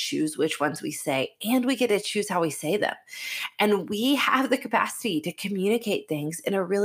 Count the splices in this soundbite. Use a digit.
0